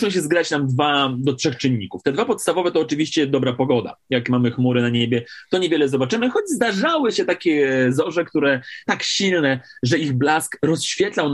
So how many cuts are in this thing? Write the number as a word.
one